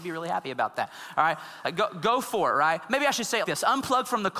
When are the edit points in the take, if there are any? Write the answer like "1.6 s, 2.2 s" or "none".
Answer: 3.4 s